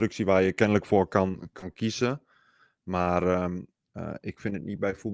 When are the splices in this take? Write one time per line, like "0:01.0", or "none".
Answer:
none

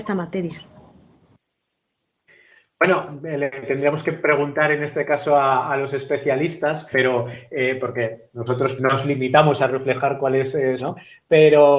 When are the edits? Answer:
0:06.9
0:08.8
0:10.8

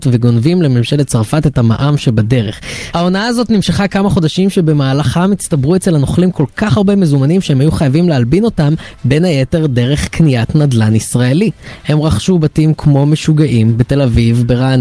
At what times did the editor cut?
0:02.9

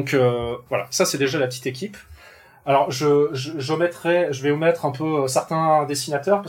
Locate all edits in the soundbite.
none

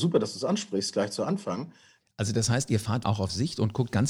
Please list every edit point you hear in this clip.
0:02.0
0:03.0

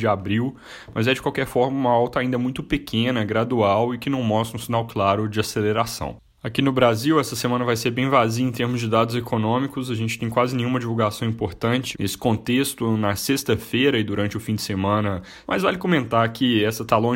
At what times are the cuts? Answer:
0:11.9
0:15.4

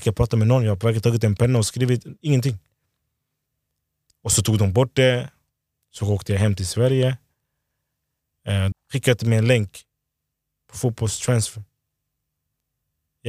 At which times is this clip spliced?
0:08.7

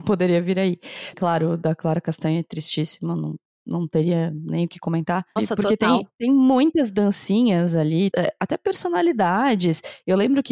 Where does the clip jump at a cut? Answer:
0:01.1
0:05.4
0:08.1

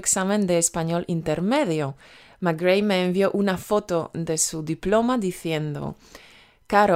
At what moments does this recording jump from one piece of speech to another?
none

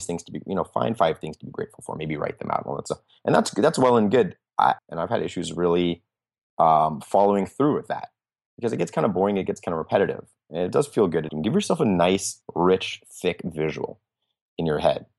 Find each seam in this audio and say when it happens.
0:04.8
0:11.3

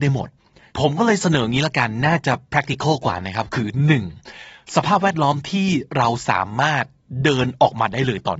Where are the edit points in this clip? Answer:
none

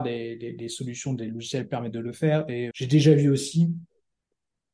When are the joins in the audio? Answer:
0:02.7

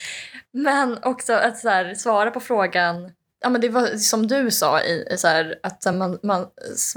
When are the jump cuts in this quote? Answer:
none

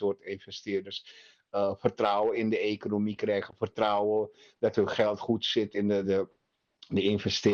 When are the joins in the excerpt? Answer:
0:06.0

